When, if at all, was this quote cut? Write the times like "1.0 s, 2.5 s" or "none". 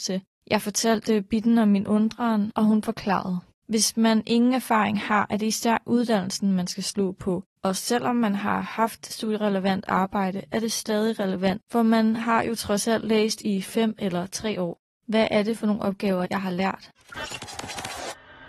3.6 s, 15.0 s, 16.3 s